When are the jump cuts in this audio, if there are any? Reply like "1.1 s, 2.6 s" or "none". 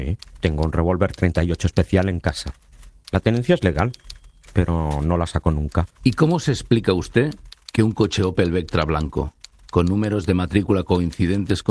6.0 s